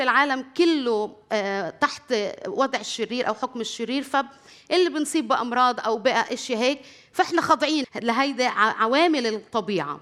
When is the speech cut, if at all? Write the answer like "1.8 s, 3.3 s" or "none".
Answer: 7.8 s